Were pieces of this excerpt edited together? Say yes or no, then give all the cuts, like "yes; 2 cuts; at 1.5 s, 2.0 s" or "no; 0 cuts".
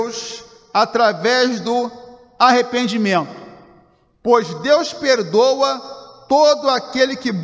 no; 0 cuts